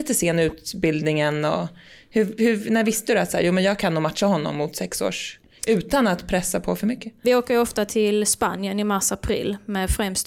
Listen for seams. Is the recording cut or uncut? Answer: uncut